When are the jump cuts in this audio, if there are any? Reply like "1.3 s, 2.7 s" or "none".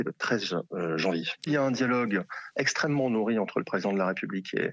1.5 s